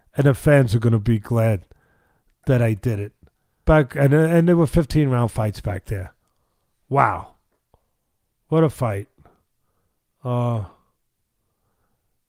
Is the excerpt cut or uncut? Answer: cut